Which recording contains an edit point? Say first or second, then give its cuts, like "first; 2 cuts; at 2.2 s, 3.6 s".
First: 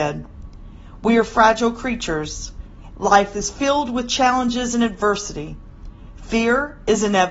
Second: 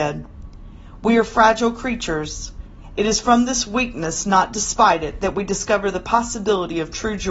first; 1 cut; at 2.9 s